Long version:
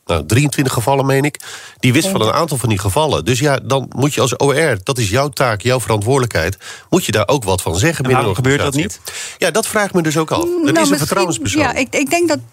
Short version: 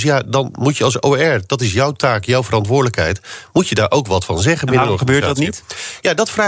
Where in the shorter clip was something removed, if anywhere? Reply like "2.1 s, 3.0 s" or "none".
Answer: none